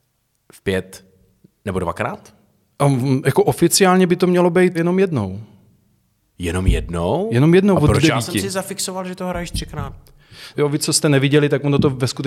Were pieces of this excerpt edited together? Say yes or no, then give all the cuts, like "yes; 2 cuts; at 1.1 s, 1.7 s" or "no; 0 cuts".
yes; 2 cuts; at 4.7 s, 10.5 s